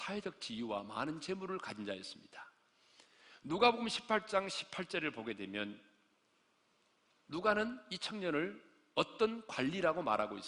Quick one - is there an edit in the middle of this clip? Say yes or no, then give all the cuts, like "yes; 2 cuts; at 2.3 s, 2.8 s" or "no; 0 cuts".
no; 0 cuts